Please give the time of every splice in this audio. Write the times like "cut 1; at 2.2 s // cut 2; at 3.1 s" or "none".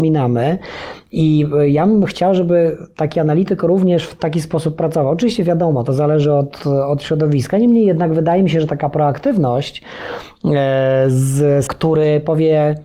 cut 1; at 6.6 s // cut 2; at 11.7 s